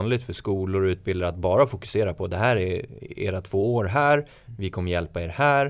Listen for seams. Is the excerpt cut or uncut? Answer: uncut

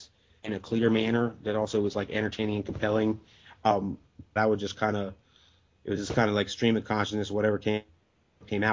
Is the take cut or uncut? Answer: cut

